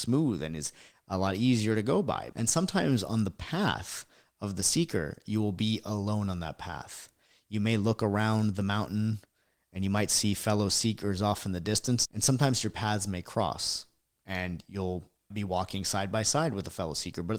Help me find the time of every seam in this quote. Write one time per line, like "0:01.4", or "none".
0:02.3